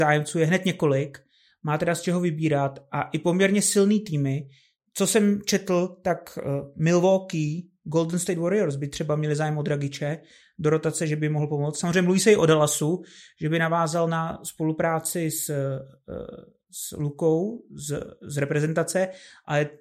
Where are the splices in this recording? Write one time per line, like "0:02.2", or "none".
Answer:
none